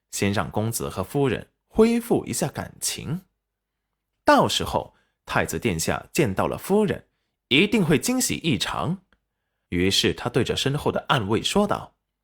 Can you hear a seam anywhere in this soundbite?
yes; 1 cut; at 9.7 s

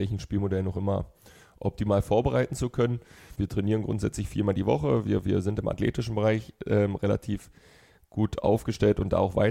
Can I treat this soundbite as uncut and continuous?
no; 1 cut; at 3.4 s

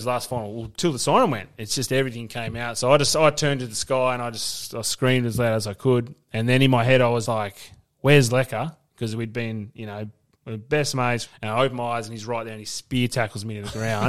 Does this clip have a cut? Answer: yes; 2 cuts; at 7.3 s, 11.3 s

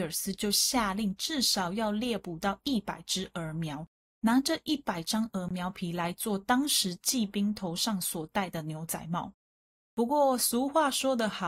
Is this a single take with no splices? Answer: yes; 0 cuts

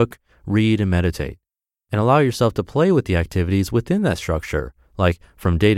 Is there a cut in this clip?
no; 0 cuts

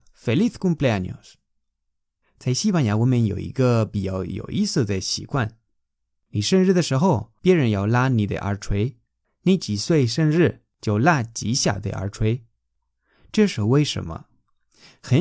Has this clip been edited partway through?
no; 0 cuts

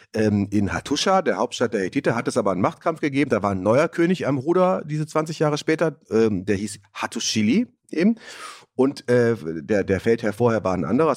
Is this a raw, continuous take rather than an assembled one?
yes; 0 cuts

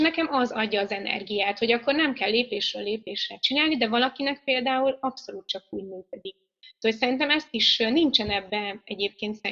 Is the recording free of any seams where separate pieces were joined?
yes; 0 cuts

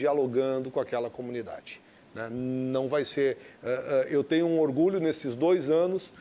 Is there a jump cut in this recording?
no; 0 cuts

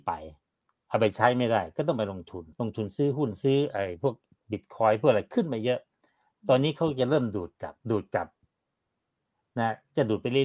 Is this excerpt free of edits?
no; 2 cuts; at 2.5 s, 7.8 s

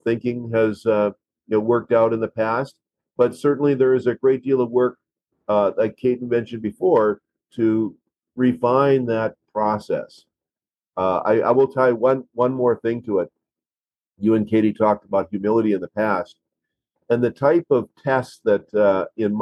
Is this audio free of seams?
yes; 0 cuts

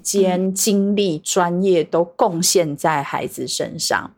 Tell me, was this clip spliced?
no; 0 cuts

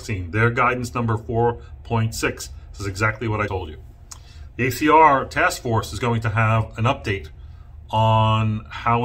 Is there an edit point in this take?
yes; 1 cut; at 3.5 s

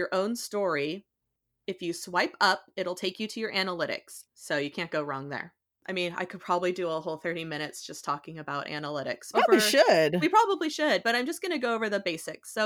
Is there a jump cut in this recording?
yes; 3 cuts; at 4.3 s, 5.8 s, 9.3 s

